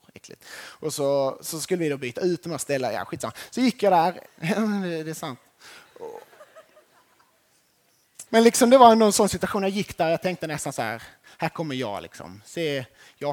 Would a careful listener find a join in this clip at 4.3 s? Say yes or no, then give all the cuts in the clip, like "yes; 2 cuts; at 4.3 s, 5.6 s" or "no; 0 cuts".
yes; 2 cuts; at 4.3 s, 8.3 s